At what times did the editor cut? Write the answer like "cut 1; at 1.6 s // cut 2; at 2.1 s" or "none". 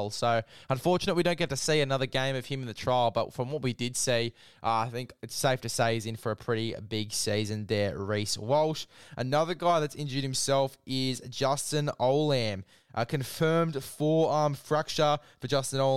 none